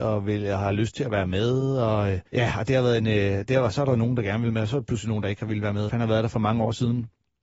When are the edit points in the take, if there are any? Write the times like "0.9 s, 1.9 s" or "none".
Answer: 2.3 s, 5.9 s